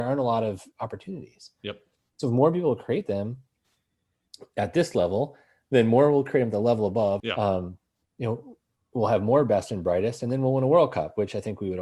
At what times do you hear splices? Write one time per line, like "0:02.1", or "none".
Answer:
0:07.2